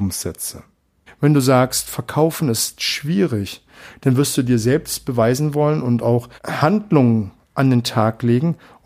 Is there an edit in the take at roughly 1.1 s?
yes; 2 cuts; at 1.1 s, 6.4 s

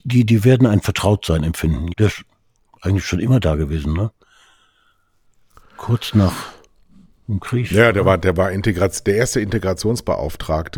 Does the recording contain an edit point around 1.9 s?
yes; 1 cut; at 1.9 s

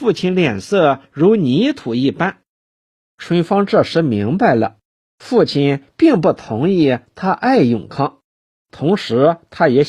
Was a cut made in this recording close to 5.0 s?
no; 1 cut; at 2.7 s

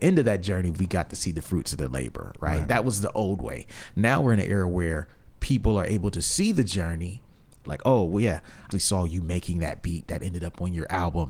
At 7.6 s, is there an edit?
yes; 2 cuts; at 7.6 s, 8.7 s

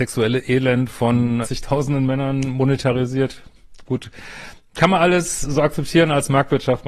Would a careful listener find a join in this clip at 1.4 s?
yes; 1 cut; at 1.4 s

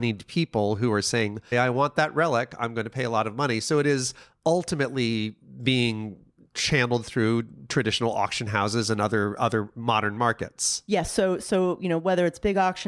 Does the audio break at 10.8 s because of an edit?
no; 1 cut; at 1.5 s

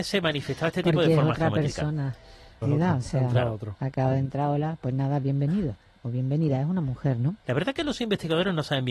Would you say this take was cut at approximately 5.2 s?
no; 2 cuts; at 2.6 s, 7.4 s

